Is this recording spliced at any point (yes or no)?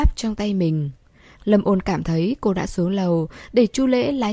yes